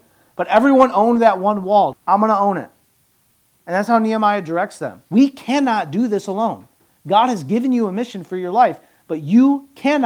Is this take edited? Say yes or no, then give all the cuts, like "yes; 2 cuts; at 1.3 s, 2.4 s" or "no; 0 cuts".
yes; 2 cuts; at 1.9 s, 5.1 s